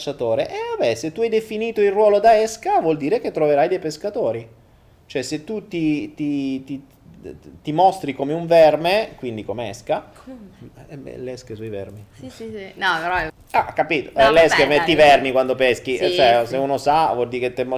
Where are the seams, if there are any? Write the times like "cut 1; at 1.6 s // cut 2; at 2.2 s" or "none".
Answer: cut 1; at 13.3 s